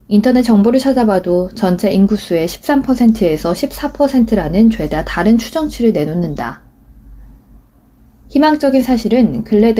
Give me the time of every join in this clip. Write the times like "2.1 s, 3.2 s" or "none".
none